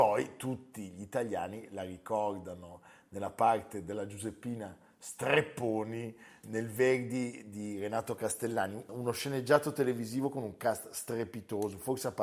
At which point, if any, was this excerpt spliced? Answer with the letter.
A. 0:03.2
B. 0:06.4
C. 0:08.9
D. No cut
B